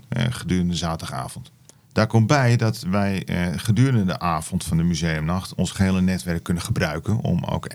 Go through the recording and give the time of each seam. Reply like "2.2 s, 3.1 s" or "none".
none